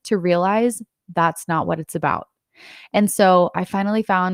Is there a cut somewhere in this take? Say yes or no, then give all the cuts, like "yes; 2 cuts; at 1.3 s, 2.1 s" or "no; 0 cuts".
no; 0 cuts